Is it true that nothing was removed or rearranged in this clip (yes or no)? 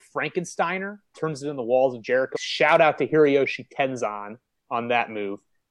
no